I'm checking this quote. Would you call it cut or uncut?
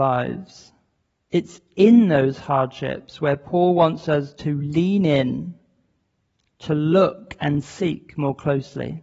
cut